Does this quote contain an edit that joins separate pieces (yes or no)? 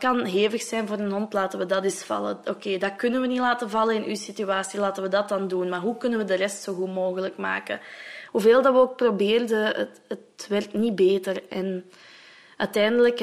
yes